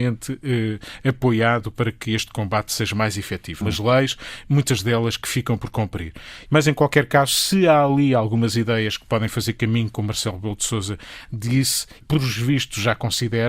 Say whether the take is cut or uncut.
cut